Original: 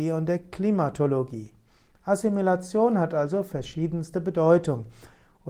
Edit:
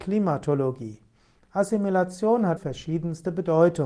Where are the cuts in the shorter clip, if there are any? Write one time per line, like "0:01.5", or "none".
0:02.6